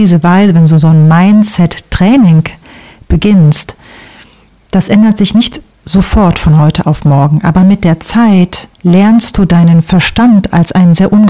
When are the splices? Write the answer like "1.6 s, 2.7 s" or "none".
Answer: 8.7 s